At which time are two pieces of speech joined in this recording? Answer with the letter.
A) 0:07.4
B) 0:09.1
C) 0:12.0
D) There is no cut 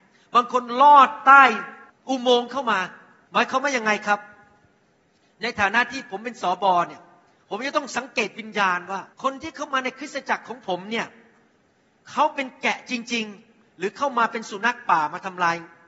B